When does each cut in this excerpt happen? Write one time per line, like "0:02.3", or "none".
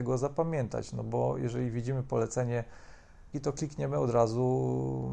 0:03.3